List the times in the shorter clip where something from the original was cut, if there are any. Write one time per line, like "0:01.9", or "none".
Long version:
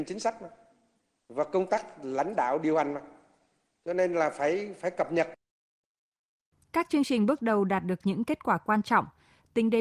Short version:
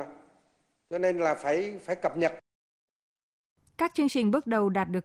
none